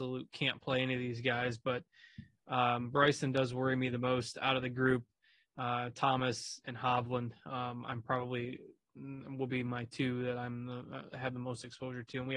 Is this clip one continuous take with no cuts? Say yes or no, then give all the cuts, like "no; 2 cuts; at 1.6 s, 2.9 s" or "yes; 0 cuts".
no; 1 cut; at 6.6 s